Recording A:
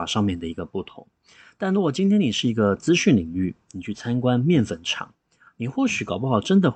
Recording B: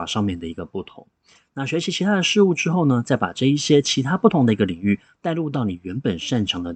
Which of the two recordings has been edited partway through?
B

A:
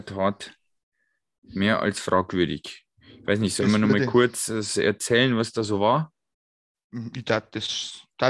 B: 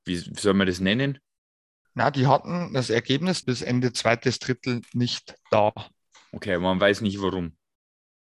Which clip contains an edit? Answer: B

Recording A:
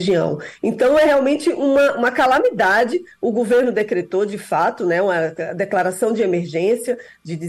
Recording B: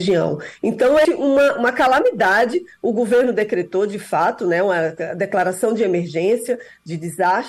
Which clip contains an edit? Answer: B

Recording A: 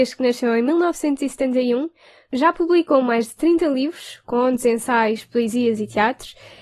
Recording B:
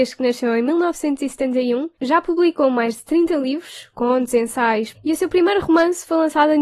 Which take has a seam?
B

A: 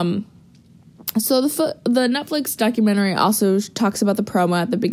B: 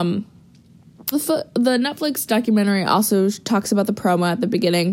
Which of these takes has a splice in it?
B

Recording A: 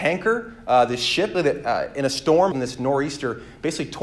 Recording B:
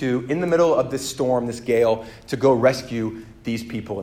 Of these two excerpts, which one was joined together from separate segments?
A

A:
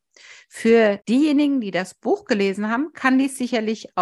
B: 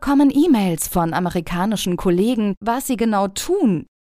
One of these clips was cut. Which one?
B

